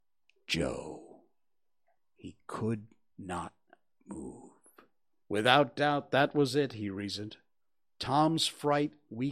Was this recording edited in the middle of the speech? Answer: yes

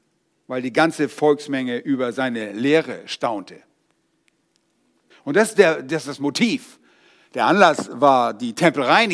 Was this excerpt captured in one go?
no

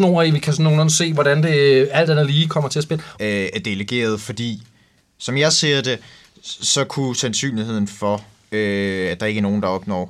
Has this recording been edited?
yes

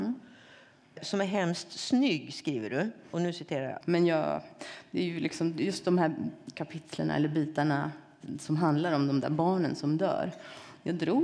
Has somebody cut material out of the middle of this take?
yes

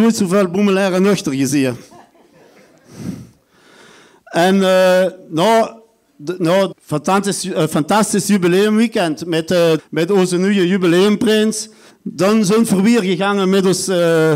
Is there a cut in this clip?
yes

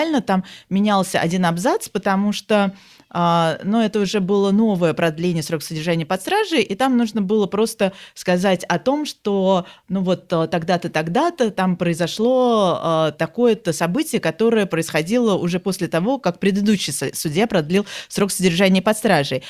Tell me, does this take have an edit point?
no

